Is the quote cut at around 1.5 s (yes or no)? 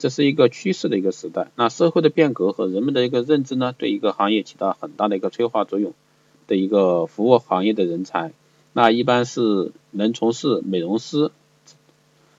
no